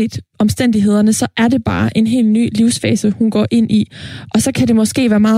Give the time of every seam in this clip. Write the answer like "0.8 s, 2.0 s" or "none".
none